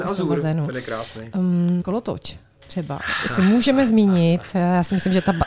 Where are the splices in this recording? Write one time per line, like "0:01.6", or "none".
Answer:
0:01.8